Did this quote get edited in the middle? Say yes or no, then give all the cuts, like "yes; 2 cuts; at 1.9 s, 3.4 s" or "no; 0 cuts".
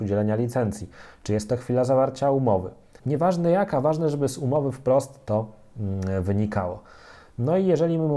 yes; 1 cut; at 3.0 s